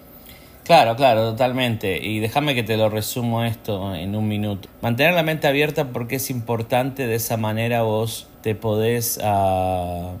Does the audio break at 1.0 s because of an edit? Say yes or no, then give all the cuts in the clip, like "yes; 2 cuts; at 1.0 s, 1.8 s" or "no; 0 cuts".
no; 2 cuts; at 4.6 s, 8.3 s